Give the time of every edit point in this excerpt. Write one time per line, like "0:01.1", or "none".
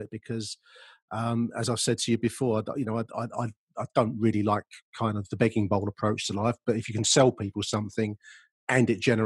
none